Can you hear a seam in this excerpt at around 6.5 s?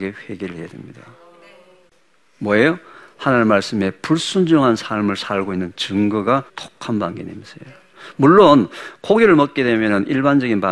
yes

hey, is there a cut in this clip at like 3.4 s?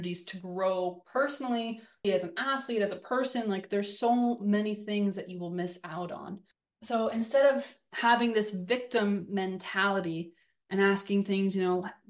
no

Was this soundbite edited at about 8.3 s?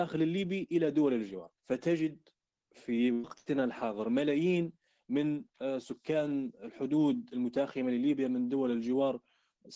no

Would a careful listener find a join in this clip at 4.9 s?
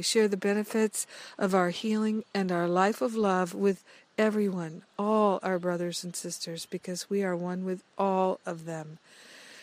no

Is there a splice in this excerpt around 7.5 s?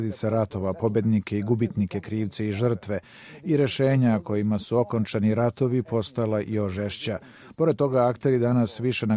no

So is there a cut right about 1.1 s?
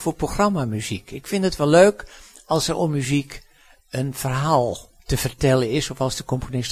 no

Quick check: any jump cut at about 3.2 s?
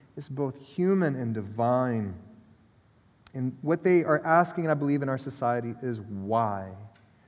no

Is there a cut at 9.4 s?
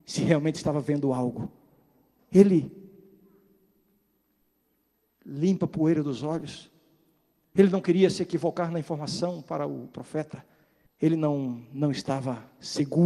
no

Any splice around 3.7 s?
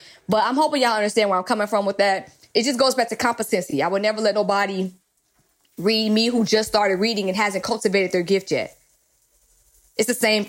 no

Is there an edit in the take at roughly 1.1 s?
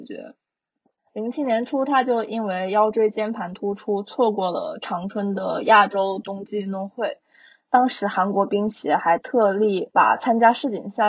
yes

